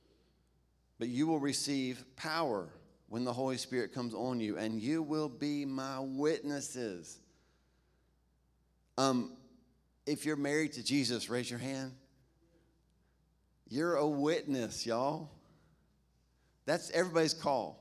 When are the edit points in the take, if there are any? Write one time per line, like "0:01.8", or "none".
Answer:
none